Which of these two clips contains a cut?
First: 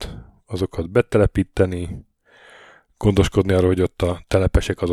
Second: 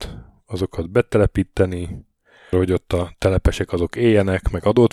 second; 1 cut; at 2.5 s

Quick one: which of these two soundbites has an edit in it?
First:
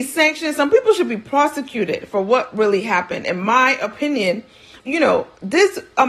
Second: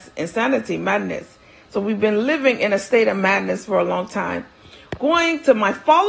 first; 1 cut; at 4.8 s

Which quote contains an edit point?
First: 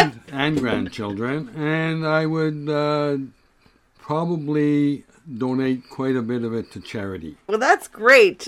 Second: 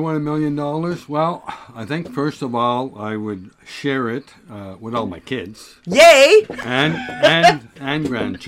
first; 1 cut; at 7.5 s

